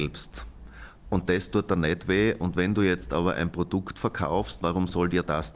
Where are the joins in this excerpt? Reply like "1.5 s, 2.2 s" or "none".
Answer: 1.0 s